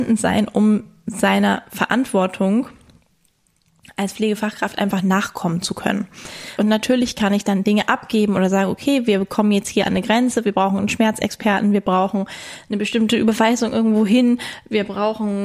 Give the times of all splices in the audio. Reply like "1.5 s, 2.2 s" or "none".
6.6 s